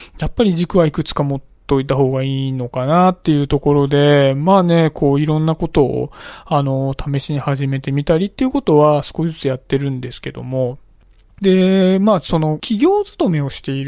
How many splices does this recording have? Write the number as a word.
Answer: zero